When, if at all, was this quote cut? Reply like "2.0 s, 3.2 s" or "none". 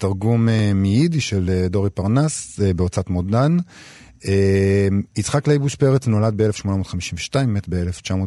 none

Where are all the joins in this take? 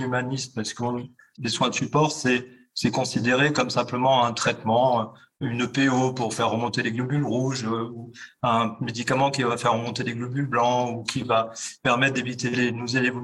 none

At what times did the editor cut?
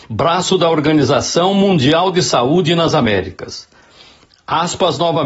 none

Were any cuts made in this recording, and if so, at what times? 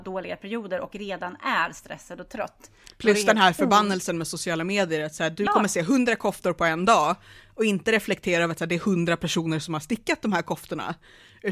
none

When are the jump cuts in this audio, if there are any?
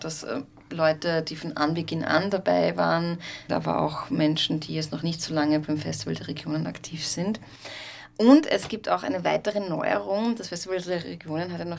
3.5 s

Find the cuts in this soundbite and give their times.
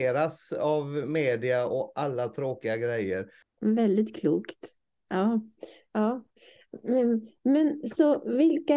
3.4 s

